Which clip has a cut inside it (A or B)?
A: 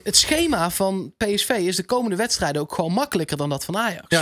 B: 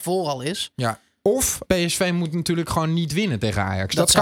B